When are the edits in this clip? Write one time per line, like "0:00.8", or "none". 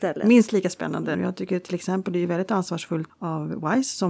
0:01.1
0:03.1